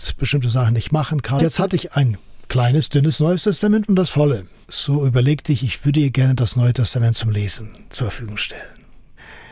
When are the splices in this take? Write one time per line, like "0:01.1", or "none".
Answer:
0:01.4
0:04.7

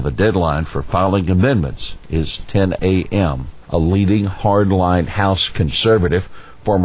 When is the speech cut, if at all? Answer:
0:03.6

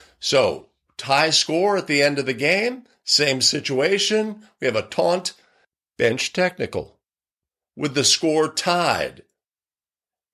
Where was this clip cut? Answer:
none

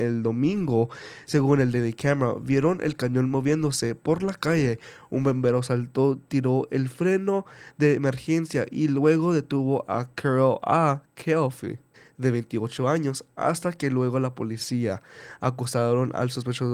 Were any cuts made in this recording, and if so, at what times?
none

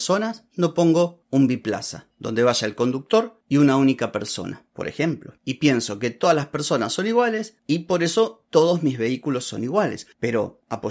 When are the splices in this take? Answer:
0:05.4

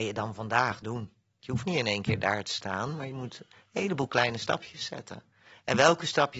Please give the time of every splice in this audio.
0:01.4

